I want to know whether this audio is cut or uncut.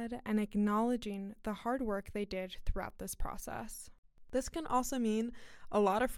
uncut